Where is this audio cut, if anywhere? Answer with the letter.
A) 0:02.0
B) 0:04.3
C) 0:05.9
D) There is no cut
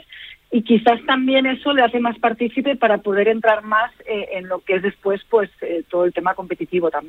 D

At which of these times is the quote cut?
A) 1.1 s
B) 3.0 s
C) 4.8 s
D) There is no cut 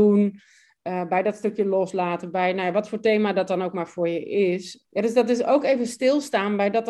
D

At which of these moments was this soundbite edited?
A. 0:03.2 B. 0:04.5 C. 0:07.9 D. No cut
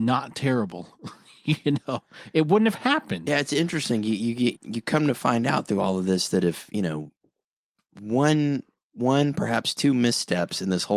B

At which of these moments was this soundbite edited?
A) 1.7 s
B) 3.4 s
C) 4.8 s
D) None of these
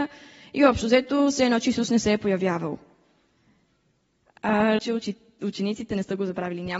C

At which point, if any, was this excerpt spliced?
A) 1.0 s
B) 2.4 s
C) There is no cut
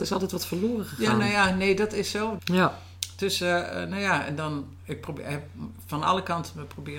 B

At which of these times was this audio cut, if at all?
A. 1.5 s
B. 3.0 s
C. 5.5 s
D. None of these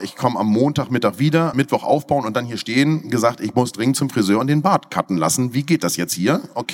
A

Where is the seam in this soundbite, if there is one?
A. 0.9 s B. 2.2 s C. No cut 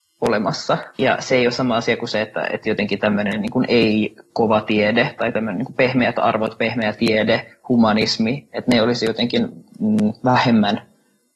A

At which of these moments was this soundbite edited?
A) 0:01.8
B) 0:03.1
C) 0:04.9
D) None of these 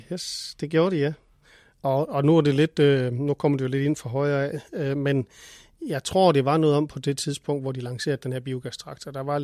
A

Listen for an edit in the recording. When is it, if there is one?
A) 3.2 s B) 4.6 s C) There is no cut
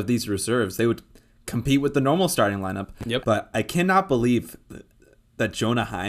A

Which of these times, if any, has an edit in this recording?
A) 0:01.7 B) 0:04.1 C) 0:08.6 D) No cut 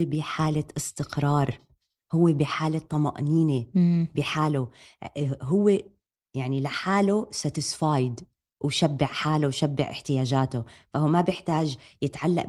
D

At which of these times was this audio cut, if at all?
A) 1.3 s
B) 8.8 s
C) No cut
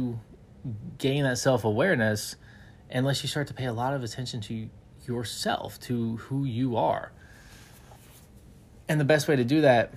C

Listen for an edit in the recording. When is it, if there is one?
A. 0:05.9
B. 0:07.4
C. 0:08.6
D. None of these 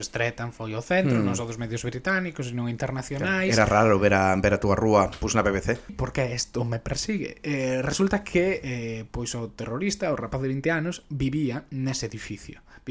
A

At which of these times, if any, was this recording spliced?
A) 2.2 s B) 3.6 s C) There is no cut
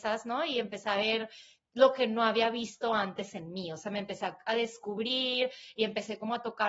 C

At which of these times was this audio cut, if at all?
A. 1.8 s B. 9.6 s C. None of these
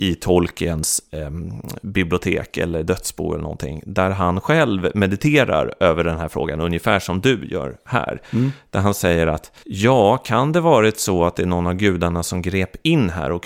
B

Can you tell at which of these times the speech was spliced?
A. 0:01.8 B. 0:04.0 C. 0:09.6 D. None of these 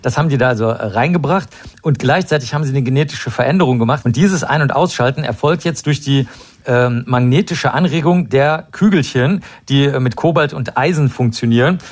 B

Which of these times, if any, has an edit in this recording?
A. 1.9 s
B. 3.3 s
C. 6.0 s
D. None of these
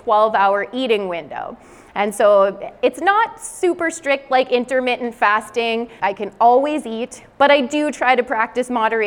C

